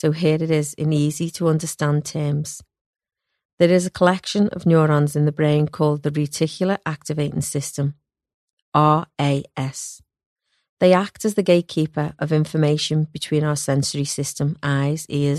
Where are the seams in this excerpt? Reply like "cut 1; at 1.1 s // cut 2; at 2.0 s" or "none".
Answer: none